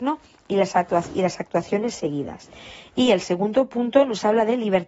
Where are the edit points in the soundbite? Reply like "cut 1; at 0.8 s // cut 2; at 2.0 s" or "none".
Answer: none